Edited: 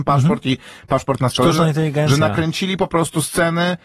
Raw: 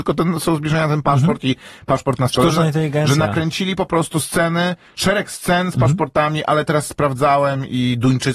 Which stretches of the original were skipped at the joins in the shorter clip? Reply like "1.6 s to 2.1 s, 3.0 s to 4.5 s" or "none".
none

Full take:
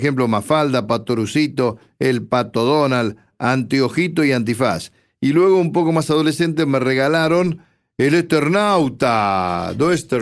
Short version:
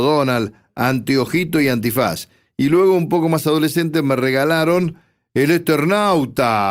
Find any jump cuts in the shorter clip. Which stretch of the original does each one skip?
none

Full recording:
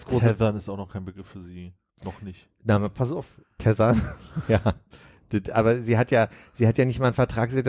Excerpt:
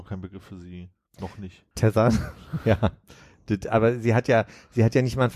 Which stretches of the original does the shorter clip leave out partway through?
2.5 s to 3.5 s

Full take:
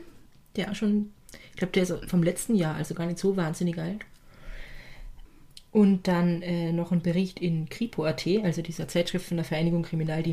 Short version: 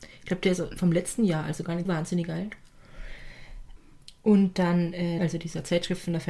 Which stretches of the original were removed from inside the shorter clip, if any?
3.2 s to 3.3 s, 6.7 s to 8.4 s

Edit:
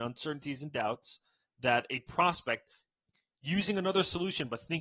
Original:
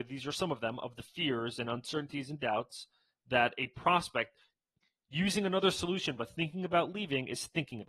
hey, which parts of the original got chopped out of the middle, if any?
none

